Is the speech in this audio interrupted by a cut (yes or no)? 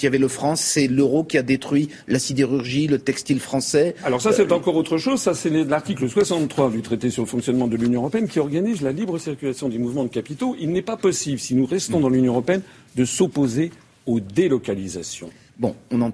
no